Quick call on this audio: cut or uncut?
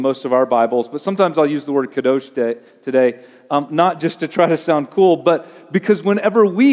uncut